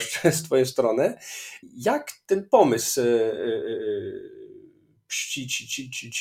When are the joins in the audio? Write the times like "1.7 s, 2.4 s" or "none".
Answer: none

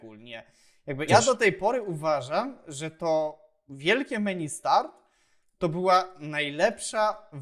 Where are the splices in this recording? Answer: 1.1 s

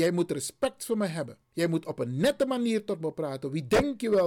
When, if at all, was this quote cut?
none

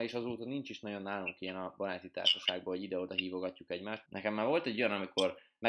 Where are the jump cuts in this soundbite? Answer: 4.1 s

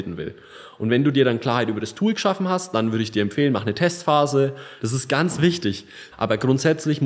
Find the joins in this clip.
4.8 s, 6.1 s

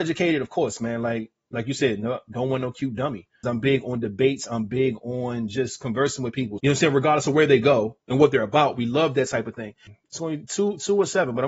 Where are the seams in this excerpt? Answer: 3.4 s, 6.6 s, 9.9 s

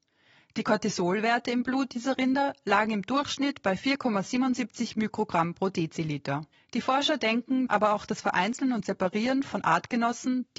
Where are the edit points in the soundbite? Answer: 6.5 s, 7.7 s

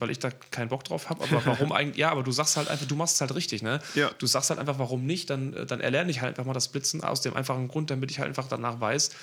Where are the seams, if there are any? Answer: none

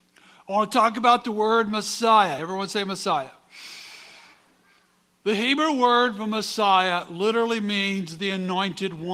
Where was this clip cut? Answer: none

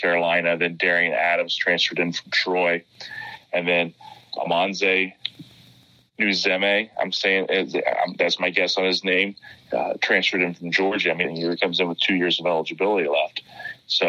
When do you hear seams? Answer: 11.2 s

